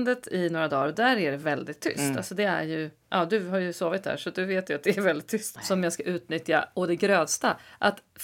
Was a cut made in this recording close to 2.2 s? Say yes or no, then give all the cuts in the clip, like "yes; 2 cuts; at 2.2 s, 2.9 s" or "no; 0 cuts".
no; 1 cut; at 5.6 s